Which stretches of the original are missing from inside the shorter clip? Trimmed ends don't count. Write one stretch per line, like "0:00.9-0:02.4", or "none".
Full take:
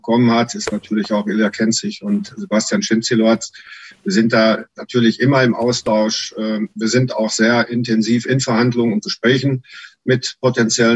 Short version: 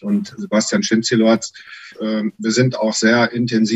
0:03.9-0:06.3